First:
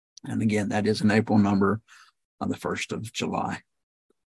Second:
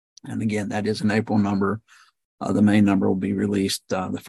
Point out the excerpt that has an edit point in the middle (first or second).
first